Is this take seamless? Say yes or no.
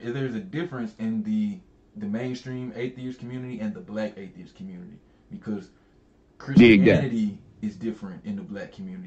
yes